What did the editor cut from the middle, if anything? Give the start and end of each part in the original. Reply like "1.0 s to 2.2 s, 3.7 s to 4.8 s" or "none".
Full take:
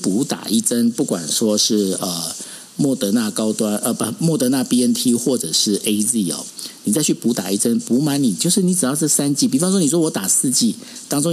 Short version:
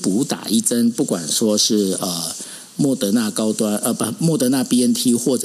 none